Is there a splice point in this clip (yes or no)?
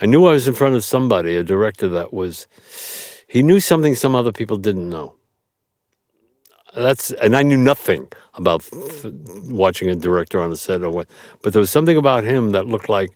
no